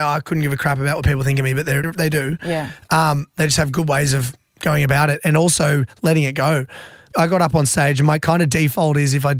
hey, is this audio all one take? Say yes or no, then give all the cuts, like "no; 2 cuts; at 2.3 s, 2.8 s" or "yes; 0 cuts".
no; 1 cut; at 1.8 s